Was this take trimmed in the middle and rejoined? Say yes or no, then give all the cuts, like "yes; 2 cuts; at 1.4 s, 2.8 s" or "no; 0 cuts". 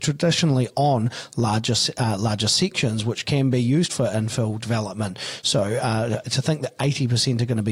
no; 0 cuts